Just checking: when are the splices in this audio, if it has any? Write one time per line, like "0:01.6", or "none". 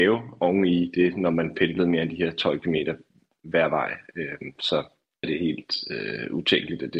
0:05.2